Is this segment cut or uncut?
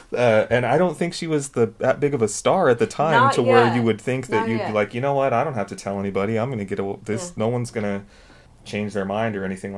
uncut